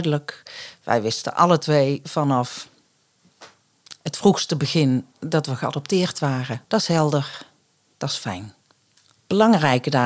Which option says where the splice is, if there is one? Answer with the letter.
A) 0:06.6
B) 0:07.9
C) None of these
A